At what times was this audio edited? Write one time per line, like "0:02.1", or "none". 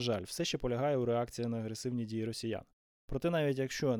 none